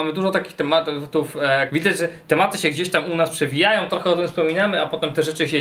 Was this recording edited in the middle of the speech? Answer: yes; 1 cut; at 1.7 s

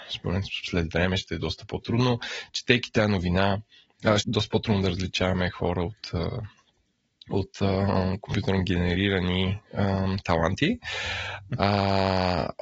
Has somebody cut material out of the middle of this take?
yes; 2 cuts; at 4.2 s, 11.5 s

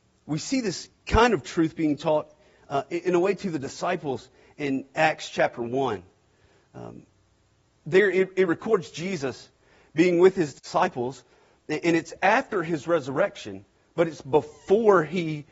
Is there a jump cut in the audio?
no; 0 cuts

